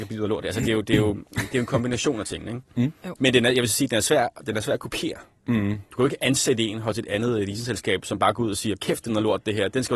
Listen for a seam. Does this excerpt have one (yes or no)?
yes